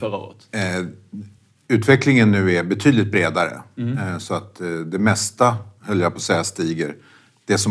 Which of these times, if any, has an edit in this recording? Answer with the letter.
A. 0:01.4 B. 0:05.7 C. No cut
C